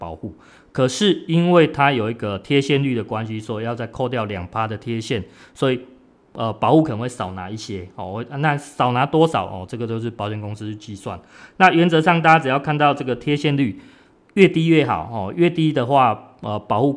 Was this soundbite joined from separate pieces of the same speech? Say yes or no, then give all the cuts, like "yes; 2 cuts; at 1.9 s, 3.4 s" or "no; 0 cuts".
no; 0 cuts